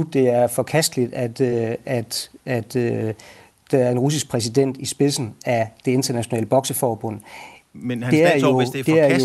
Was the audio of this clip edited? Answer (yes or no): no